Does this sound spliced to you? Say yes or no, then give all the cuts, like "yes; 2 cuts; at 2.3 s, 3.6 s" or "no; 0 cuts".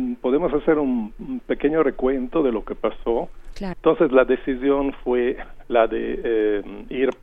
yes; 1 cut; at 3.7 s